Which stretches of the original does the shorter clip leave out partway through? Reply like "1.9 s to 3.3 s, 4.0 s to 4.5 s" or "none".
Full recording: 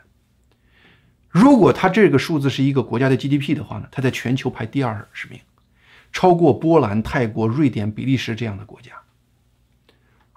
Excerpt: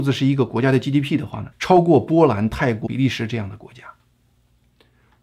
3.9 s to 6.0 s, 7.4 s to 7.9 s